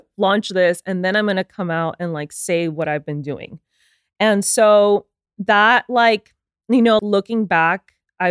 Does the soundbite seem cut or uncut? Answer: cut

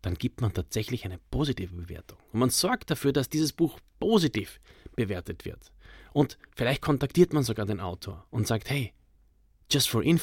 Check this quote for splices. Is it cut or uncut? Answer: uncut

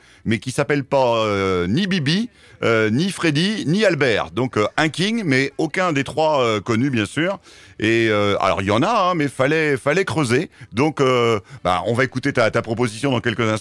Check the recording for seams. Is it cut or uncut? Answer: uncut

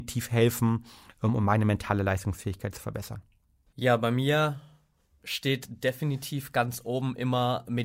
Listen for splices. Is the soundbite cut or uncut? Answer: cut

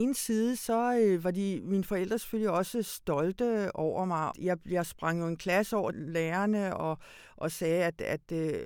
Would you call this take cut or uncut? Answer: cut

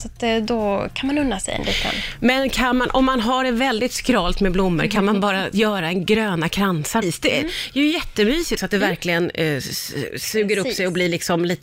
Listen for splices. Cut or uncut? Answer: cut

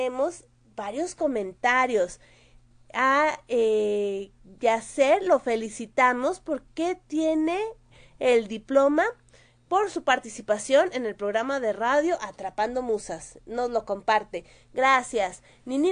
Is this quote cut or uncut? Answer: uncut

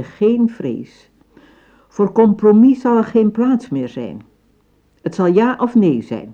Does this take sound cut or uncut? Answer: uncut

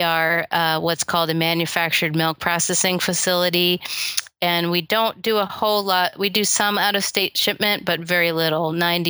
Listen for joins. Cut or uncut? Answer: uncut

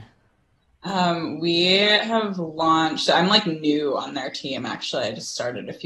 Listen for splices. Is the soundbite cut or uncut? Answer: uncut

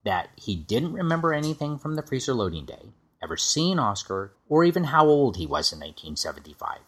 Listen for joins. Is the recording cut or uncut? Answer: cut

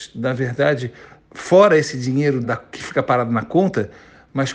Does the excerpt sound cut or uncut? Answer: cut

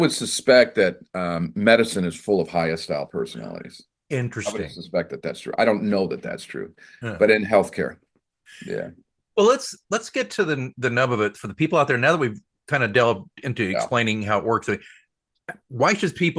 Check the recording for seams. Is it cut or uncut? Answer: uncut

